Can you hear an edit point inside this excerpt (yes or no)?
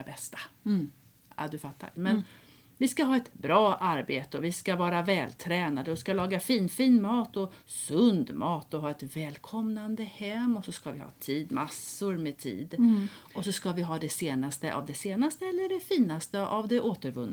yes